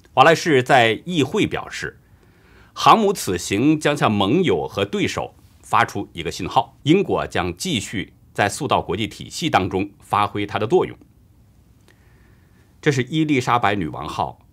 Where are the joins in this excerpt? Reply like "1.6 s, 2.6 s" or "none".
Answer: 6.8 s